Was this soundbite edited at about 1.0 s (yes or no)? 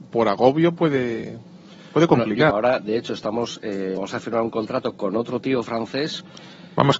no